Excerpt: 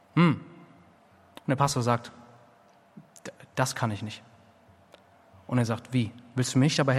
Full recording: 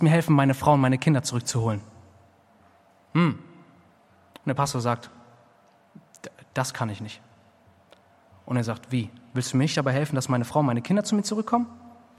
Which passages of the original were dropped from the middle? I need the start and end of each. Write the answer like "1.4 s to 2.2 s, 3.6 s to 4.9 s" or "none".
none